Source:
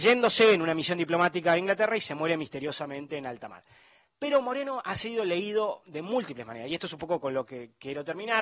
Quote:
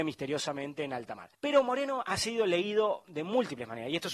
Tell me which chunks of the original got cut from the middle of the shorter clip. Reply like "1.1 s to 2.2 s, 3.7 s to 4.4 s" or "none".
3.7 s to 4.1 s